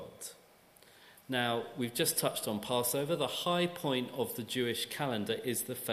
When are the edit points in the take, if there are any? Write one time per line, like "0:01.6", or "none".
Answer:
none